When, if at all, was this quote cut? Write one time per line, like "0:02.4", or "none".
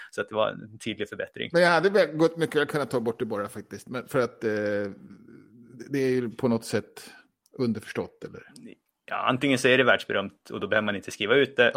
none